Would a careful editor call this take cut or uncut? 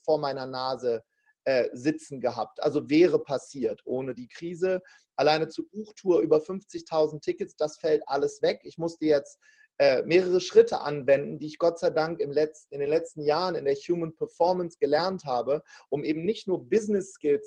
uncut